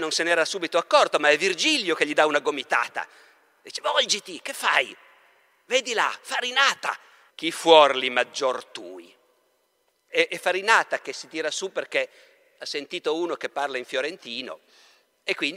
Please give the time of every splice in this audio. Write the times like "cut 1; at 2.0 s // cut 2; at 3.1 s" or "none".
cut 1; at 7.3 s // cut 2; at 10.1 s